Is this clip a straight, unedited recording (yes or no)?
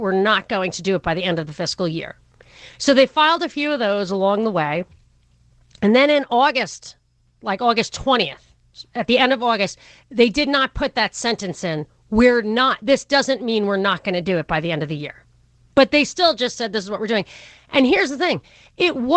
yes